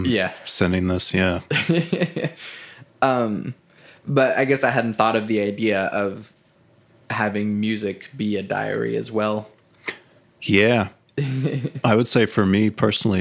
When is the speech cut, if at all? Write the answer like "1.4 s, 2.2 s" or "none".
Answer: none